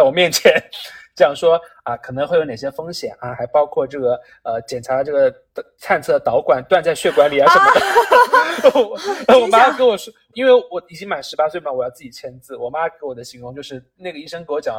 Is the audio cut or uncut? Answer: cut